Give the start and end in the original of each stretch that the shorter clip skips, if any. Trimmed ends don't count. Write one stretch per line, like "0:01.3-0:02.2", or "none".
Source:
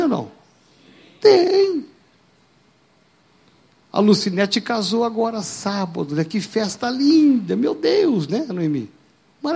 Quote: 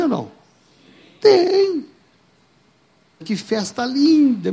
0:03.2-0:06.2